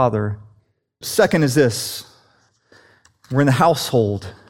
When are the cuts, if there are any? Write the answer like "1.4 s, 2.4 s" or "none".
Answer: 1.0 s